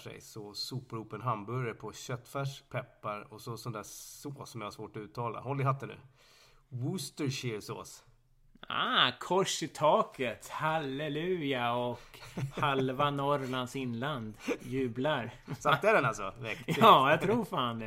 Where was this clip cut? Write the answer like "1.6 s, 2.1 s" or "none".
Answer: 2.7 s